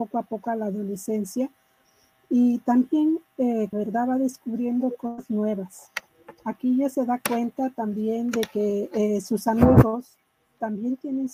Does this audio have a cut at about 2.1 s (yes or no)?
no